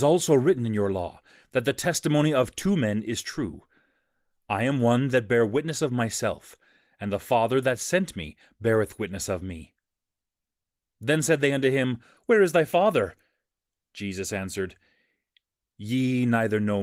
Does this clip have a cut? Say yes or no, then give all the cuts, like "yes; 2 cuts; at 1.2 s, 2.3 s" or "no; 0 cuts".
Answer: no; 0 cuts